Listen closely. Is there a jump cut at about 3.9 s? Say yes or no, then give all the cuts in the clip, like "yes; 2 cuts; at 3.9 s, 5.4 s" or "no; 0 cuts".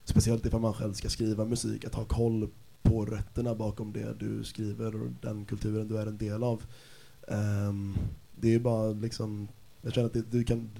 no; 2 cuts; at 8.2 s, 9.8 s